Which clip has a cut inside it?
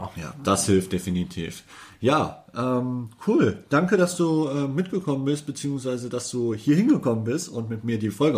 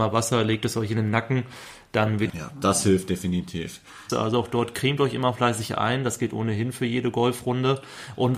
second; 2 cuts; at 2.3 s, 4.1 s

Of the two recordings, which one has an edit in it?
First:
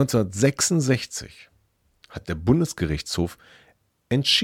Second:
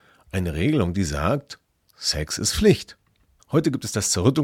second; 1 cut; at 3.4 s

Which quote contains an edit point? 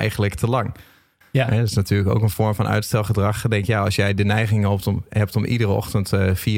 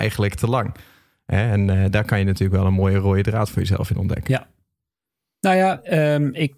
first; 1 cut; at 1.2 s

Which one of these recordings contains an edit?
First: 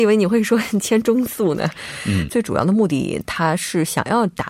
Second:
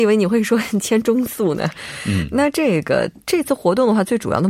first; 1 cut; at 2.3 s

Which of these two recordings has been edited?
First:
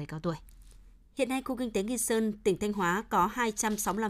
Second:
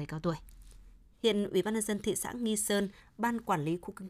second; 1 cut; at 1.1 s

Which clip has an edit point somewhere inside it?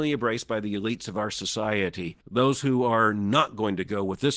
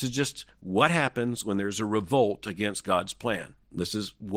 first; 1 cut; at 2.2 s

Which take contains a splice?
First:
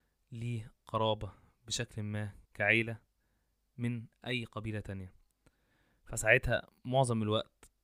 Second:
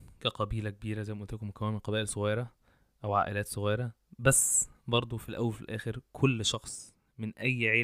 first; 1 cut; at 2.5 s

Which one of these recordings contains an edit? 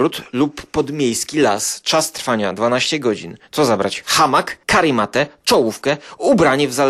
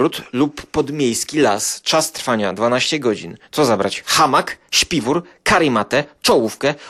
first; 1 cut; at 4.6 s

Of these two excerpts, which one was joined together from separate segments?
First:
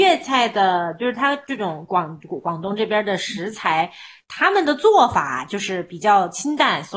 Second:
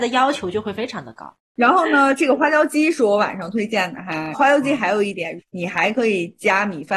second; 2 cuts; at 4.3 s, 5.4 s

